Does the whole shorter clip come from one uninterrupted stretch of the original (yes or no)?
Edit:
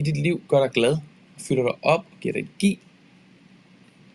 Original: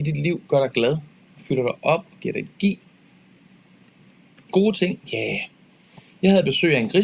yes